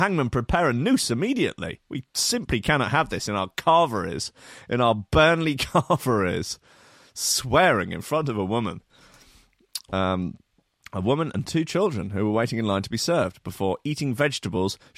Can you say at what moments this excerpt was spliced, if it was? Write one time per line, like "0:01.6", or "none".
none